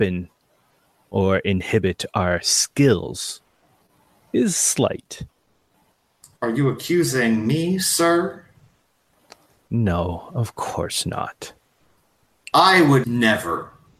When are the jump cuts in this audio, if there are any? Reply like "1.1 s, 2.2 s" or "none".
13.0 s